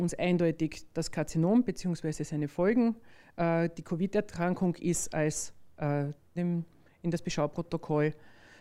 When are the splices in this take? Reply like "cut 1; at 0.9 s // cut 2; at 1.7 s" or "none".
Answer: cut 1; at 6.4 s